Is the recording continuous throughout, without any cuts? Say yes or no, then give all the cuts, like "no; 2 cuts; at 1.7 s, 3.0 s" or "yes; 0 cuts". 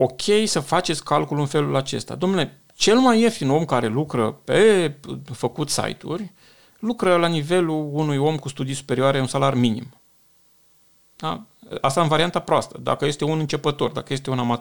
yes; 0 cuts